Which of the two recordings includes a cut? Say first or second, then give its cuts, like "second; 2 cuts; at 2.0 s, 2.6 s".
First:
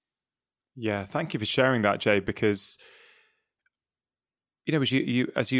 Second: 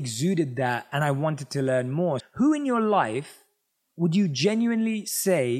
second; 1 cut; at 2.2 s